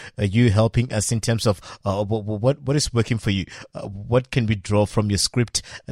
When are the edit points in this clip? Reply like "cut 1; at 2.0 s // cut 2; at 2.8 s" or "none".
none